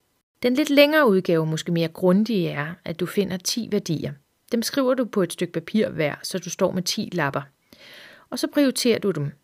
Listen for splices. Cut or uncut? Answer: uncut